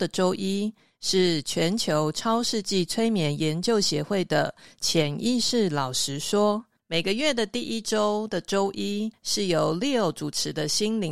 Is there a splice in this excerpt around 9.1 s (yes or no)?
no